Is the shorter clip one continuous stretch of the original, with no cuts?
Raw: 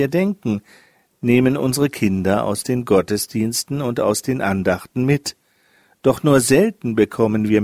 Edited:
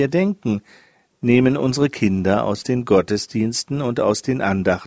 yes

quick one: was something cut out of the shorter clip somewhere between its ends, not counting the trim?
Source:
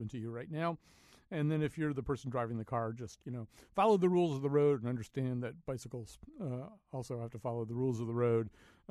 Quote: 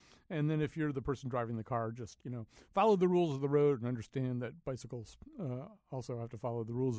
no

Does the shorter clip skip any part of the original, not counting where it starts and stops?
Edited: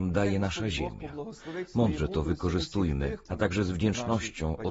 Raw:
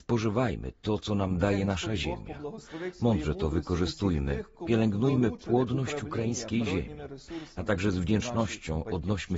yes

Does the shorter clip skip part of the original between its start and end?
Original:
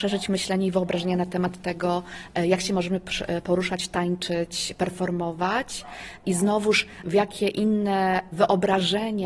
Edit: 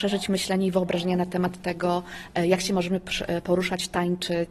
no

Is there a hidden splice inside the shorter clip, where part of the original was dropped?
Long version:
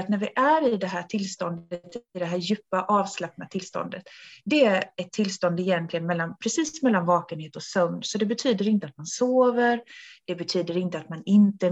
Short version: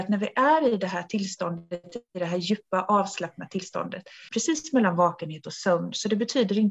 yes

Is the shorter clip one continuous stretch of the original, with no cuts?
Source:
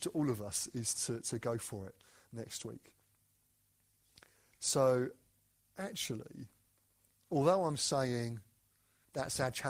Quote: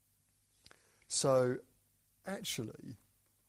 yes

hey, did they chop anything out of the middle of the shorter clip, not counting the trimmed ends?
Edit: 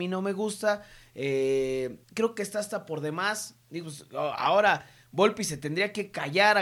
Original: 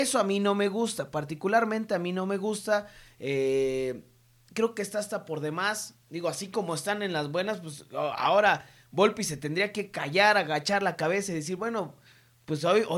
yes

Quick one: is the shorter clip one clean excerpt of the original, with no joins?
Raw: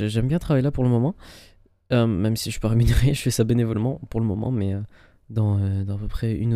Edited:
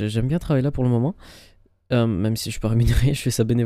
yes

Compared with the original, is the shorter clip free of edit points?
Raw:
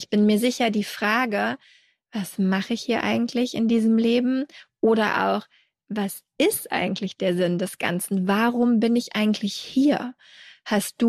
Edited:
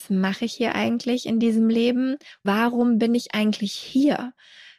no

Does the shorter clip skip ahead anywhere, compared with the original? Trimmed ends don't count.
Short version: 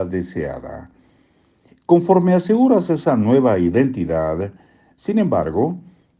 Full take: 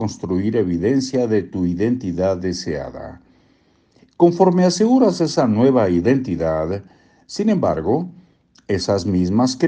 no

